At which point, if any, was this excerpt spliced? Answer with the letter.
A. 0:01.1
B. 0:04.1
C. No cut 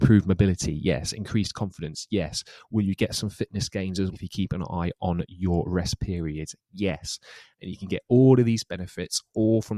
B